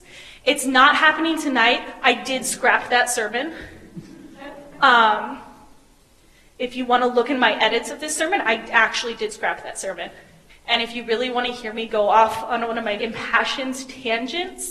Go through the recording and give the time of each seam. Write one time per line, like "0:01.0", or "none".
0:10.5
0:13.0